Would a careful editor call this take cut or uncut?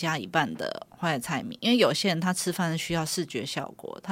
uncut